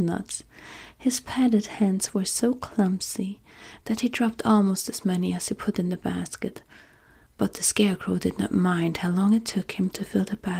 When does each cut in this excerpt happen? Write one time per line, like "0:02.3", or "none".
0:03.8